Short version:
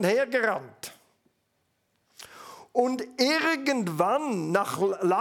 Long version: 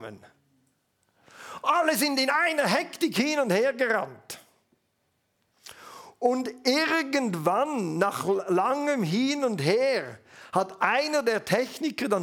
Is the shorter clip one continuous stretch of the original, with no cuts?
yes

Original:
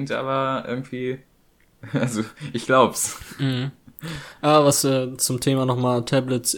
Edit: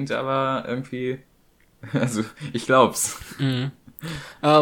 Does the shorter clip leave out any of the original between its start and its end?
no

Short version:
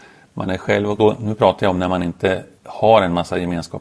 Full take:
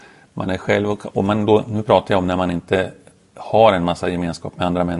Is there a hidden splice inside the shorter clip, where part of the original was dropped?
yes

